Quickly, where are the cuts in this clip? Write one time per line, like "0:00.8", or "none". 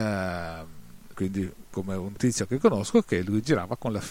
0:01.1